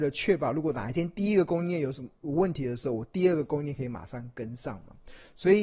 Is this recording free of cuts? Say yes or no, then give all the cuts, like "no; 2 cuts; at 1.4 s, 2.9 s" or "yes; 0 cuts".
yes; 0 cuts